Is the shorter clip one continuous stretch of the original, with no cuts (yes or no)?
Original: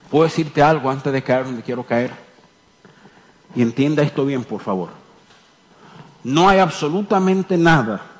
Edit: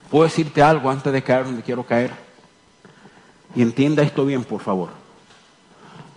yes